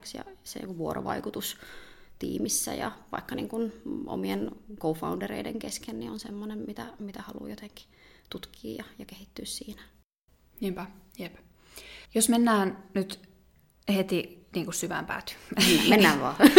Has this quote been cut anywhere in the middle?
yes; 1 cut; at 12.1 s

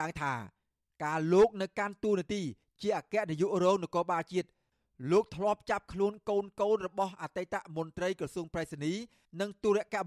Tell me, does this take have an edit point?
no; 0 cuts

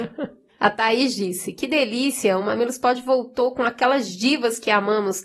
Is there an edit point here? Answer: no; 0 cuts

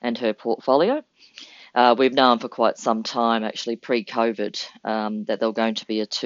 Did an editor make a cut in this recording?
no; 0 cuts

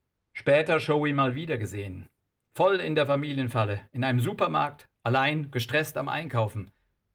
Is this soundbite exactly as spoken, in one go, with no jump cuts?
yes; 0 cuts

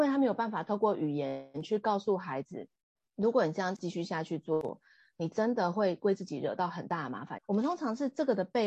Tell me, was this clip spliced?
yes; 1 cut; at 7.4 s

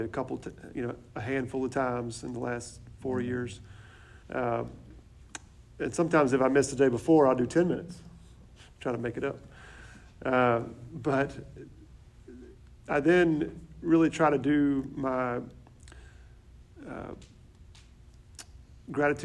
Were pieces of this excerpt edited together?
yes; 1 cut; at 4.2 s

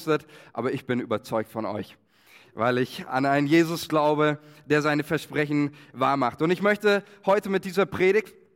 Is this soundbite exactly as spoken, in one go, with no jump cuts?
yes; 0 cuts

